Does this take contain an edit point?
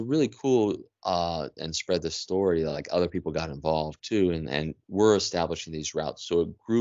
yes; 1 cut; at 1.6 s

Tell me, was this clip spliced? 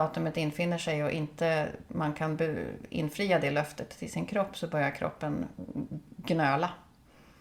no; 0 cuts

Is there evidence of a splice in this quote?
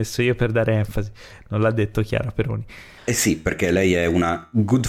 yes; 1 cut; at 3.0 s

